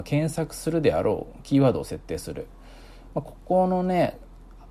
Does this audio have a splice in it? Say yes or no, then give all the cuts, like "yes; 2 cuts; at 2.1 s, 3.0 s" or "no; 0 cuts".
no; 0 cuts